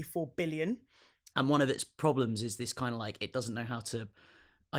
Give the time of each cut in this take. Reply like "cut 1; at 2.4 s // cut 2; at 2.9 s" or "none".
cut 1; at 1.3 s